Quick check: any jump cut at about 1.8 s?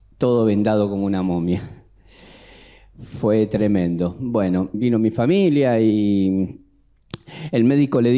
no; 1 cut; at 4.7 s

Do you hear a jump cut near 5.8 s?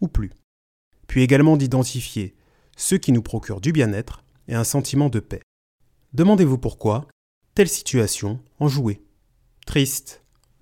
no; 1 cut; at 8.5 s

